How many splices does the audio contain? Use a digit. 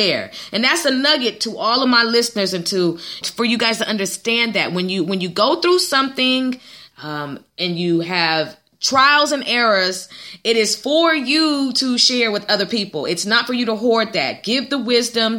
1